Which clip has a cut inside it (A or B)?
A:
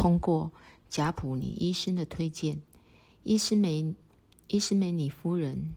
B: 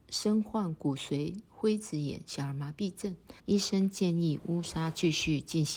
B